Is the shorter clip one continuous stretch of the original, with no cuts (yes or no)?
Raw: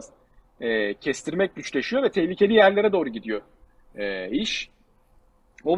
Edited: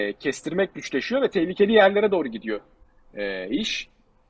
yes